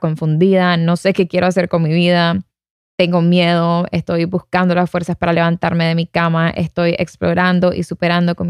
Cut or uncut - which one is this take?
uncut